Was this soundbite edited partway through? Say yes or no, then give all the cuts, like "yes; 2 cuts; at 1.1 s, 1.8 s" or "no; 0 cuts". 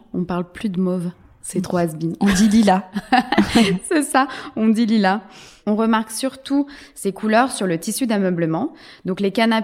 no; 0 cuts